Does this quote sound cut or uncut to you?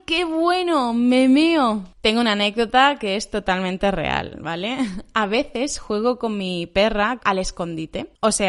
cut